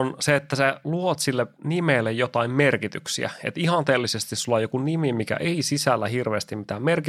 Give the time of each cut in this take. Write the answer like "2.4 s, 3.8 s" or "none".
none